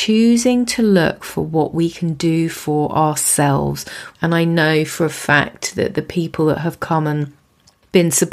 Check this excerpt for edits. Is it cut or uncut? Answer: cut